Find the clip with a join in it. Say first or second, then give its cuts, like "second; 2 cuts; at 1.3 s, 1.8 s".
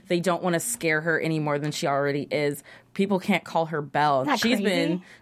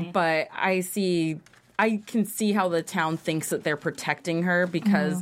first; 1 cut; at 4.2 s